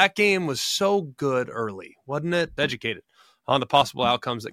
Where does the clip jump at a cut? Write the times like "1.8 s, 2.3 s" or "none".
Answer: 2.6 s